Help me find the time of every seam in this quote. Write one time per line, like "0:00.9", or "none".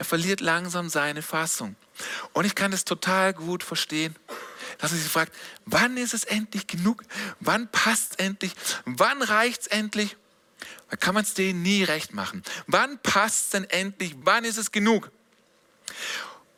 0:04.8
0:11.0
0:14.2